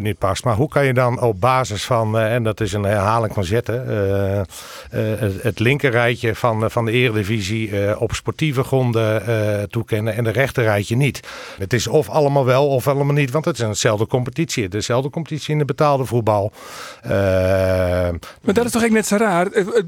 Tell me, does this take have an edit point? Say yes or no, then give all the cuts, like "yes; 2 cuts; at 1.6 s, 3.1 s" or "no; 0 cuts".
yes; 2 cuts; at 11.6 s, 18.4 s